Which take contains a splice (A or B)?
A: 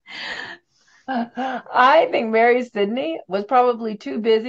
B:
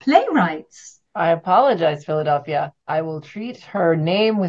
B